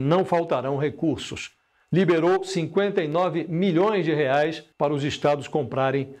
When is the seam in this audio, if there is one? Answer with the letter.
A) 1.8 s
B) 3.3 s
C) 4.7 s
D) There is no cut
C